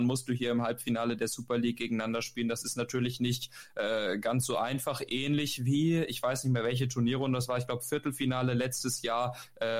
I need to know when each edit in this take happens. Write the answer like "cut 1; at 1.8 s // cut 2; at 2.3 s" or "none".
none